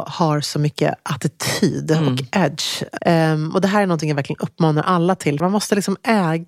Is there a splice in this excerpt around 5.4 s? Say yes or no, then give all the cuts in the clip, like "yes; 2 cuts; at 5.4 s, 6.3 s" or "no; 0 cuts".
yes; 2 cuts; at 3.0 s, 5.4 s